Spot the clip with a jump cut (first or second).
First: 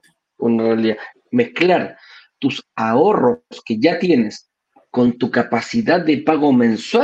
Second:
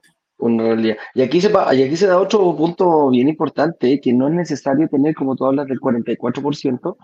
first